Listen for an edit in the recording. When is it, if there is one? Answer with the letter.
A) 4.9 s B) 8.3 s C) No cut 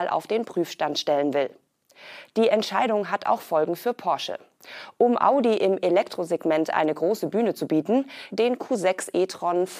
B